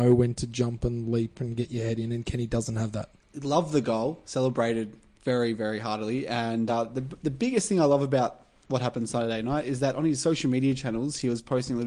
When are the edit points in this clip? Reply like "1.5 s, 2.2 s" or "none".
none